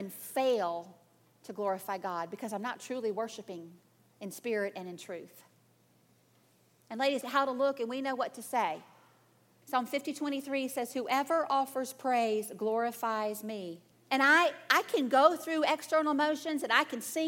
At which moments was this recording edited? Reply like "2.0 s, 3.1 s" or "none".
7.2 s, 9.6 s, 13.9 s